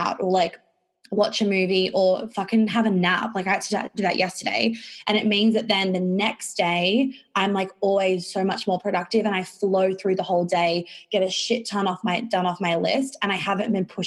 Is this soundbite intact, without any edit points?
yes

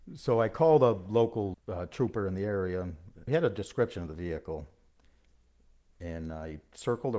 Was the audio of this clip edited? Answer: yes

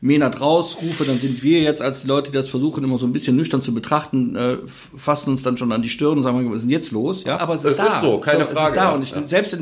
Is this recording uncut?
no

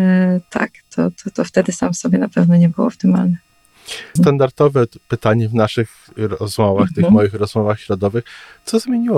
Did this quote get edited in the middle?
yes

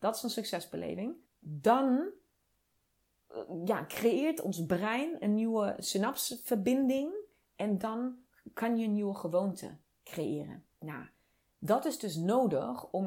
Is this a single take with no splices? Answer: no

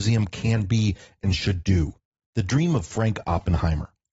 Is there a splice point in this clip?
yes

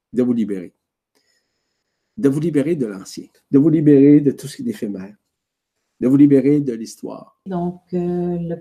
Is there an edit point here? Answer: yes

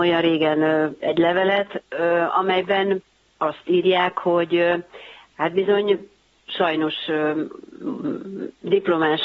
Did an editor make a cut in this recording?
yes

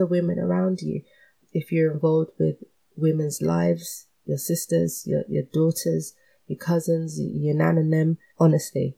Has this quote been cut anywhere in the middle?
no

